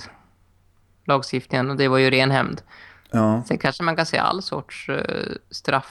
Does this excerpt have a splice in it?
no; 0 cuts

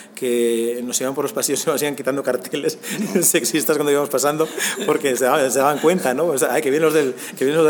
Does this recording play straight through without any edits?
yes; 0 cuts

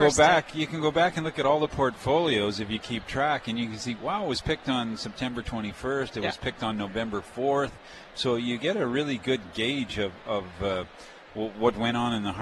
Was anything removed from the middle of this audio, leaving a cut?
no; 0 cuts

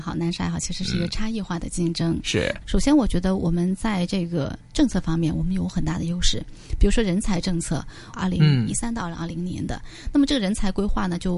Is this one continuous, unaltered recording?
no; 2 cuts; at 2.6 s, 8.1 s

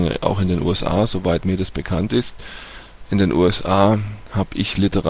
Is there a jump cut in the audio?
no; 0 cuts

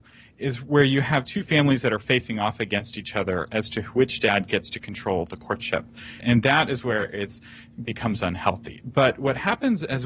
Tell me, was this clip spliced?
yes; 2 cuts; at 6.2 s, 8.8 s

